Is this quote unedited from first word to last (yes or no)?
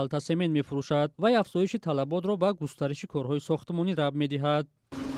no